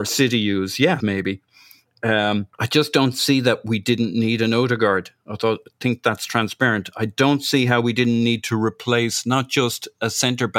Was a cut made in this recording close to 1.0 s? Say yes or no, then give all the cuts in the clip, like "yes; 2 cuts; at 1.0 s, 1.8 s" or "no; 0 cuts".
yes; 2 cuts; at 1.0 s, 2.5 s